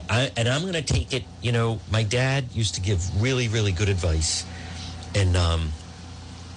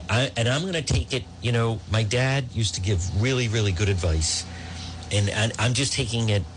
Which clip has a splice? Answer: second; 1 cut; at 5.1 s

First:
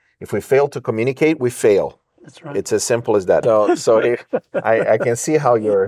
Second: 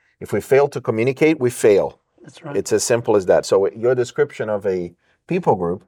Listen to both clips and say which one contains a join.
first; 1 cut; at 3.4 s

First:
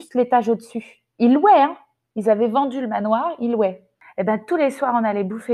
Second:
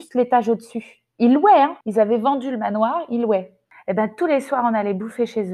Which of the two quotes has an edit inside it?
second; 1 cut; at 1.8 s

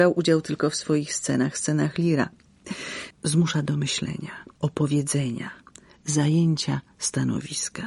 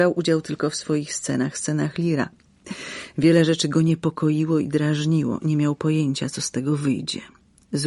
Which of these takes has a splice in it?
first; 2 cuts; at 3.1 s, 4.6 s

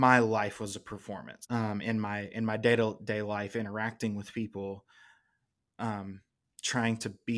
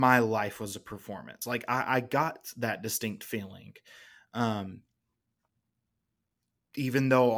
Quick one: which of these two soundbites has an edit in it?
first; 1 cut; at 1.4 s

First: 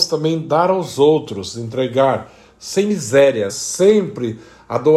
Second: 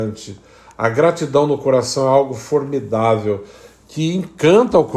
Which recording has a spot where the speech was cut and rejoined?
first; 1 cut; at 3.5 s

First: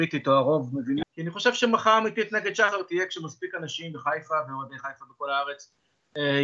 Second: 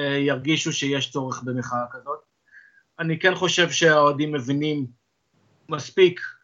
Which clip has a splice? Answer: first; 1 cut; at 1.0 s

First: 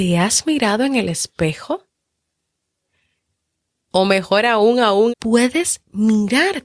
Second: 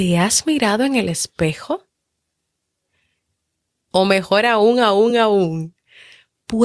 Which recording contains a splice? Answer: first; 1 cut; at 5.1 s

